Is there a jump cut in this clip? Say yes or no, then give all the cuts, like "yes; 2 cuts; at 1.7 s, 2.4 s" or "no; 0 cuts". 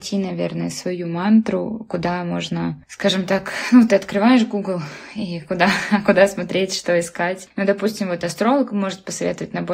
yes; 1 cut; at 7.5 s